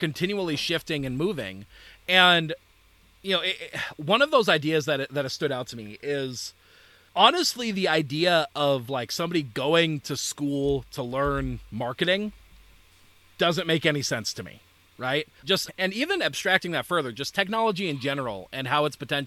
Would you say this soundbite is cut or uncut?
cut